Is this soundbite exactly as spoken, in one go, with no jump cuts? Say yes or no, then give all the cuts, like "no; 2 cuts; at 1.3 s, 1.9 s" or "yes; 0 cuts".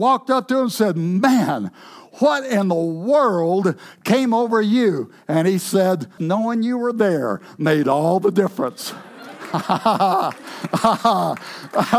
no; 1 cut; at 6.2 s